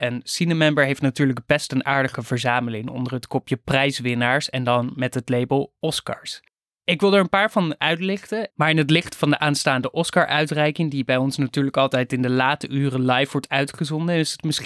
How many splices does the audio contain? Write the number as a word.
one